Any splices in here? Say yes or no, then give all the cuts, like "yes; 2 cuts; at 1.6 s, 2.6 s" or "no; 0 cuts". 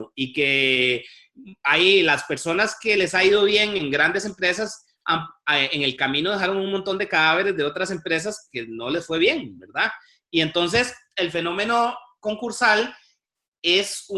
no; 0 cuts